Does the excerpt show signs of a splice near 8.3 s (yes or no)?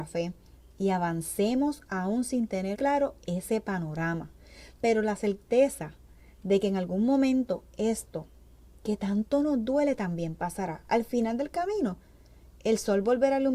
no